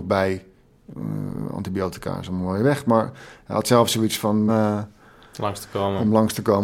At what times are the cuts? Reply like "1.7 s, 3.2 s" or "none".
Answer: 4.5 s